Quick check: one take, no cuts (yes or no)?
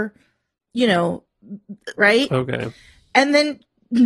no